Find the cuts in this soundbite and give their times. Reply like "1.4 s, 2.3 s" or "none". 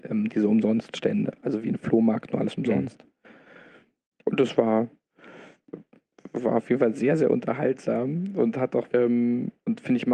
8.9 s